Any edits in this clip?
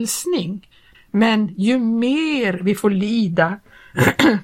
yes; 1 cut; at 0.9 s

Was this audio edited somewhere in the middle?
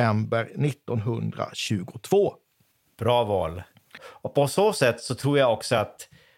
yes; 1 cut; at 4.0 s

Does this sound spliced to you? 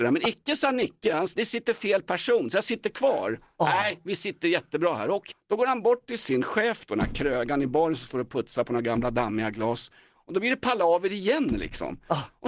yes; 1 cut; at 5.3 s

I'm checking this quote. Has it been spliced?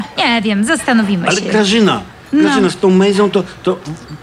no; 0 cuts

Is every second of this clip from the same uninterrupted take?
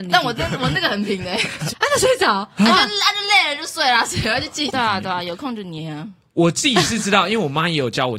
no; 2 cuts; at 1.7 s, 4.7 s

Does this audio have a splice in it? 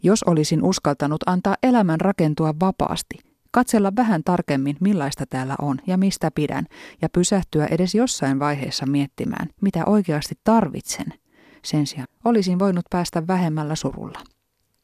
yes; 1 cut; at 12.0 s

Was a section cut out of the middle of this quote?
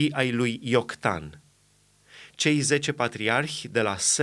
no; 0 cuts

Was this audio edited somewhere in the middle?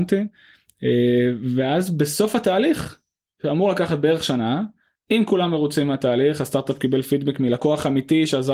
no; 0 cuts

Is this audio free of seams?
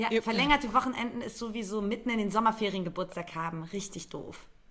yes; 0 cuts

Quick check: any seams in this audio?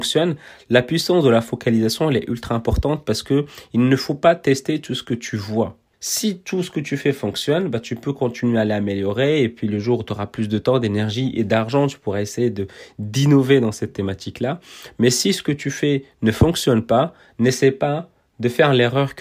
yes; 1 cut; at 5.9 s

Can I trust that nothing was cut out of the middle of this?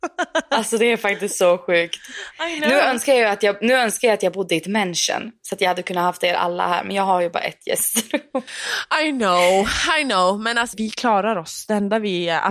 no; 1 cut; at 10.7 s

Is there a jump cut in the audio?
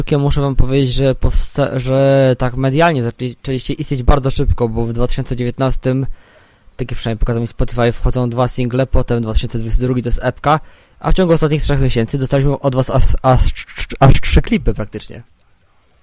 no; 0 cuts

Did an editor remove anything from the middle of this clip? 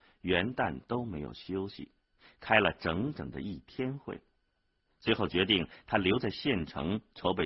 no; 0 cuts

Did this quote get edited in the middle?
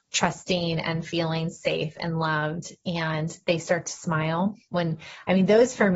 no; 0 cuts

